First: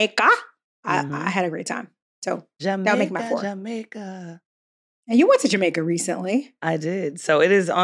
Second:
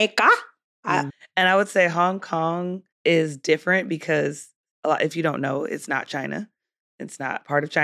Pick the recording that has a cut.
second; 2 cuts; at 1.1 s, 2.9 s

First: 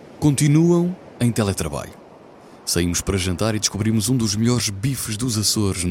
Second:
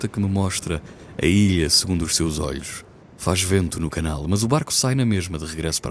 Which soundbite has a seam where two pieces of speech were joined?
second; 1 cut; at 3.0 s

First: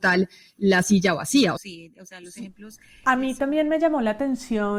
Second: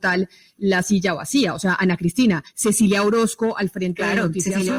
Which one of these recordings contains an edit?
first; 1 cut; at 1.6 s

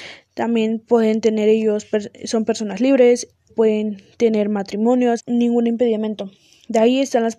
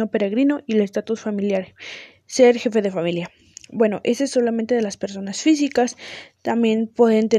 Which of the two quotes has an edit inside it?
first; 2 cuts; at 3.5 s, 5.2 s

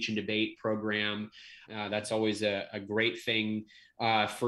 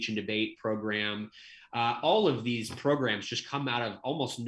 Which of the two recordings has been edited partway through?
first; 1 cut; at 1.7 s

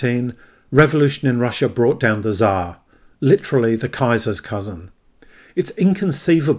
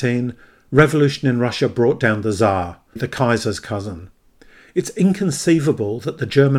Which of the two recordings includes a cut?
second; 1 cut; at 3.0 s

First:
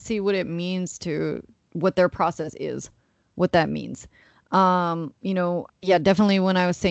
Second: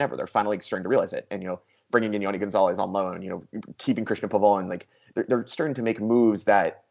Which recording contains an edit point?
first; 1 cut; at 5.7 s

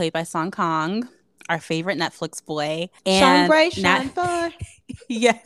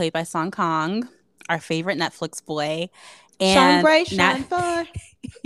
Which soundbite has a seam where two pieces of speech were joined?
first; 1 cut; at 3.0 s

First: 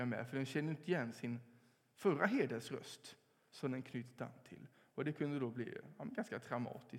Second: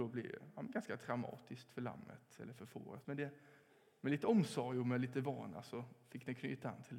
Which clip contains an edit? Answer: second; 1 cut; at 3.0 s

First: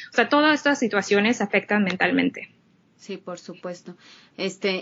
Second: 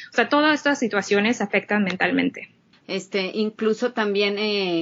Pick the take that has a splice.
second; 1 cut; at 2.7 s

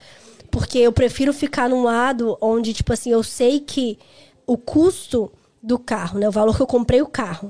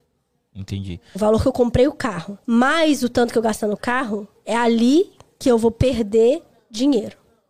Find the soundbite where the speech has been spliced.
second; 2 cuts; at 1.2 s, 2.4 s

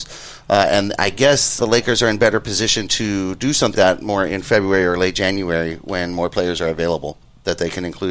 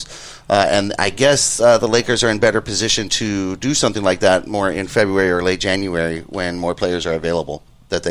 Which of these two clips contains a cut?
first; 2 cuts; at 1.6 s, 3.7 s

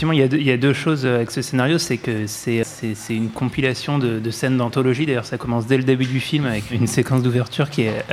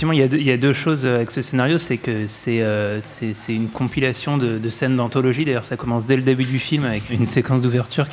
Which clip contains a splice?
first; 1 cut; at 2.6 s

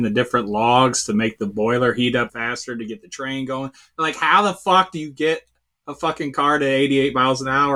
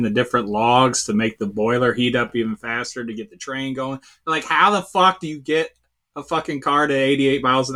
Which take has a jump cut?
first; 1 cut; at 2.3 s

